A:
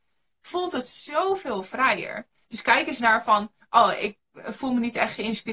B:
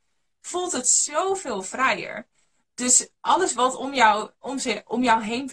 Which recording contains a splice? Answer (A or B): A